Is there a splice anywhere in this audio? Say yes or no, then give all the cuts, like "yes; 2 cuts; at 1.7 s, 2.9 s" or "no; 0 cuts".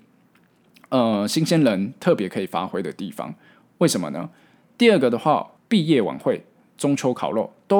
yes; 1 cut; at 5.6 s